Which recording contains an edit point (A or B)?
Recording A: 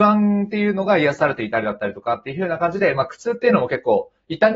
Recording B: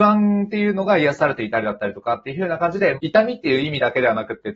B